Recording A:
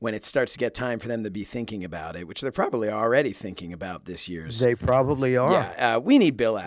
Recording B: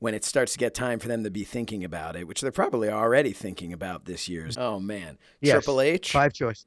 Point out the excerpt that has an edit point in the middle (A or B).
B